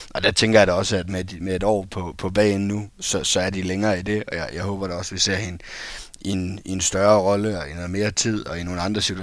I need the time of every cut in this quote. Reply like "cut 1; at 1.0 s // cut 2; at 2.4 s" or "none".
none